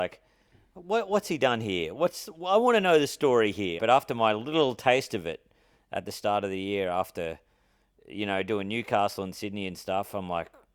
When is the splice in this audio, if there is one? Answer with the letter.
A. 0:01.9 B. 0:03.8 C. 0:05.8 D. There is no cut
B